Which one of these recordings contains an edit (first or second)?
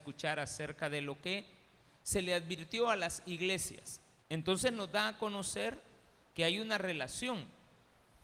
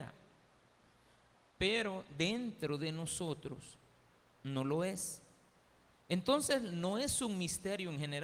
first